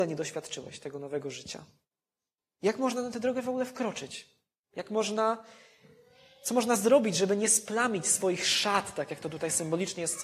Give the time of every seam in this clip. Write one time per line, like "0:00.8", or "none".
none